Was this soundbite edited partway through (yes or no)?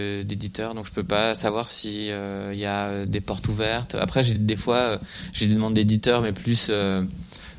yes